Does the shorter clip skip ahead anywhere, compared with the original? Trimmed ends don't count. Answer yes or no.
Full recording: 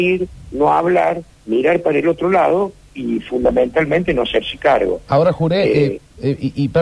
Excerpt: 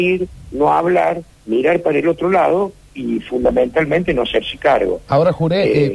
no